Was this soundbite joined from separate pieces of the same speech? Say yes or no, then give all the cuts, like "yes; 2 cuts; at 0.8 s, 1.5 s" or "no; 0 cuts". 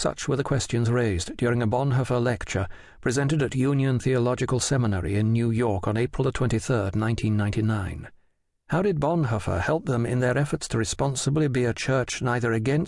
yes; 1 cut; at 8.7 s